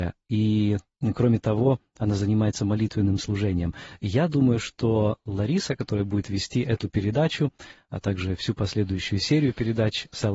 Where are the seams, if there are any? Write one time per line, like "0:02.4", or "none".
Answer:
none